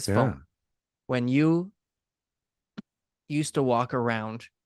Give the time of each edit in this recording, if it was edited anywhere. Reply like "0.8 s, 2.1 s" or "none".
none